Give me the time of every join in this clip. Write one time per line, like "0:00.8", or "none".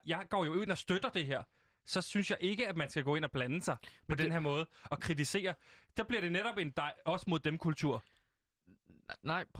none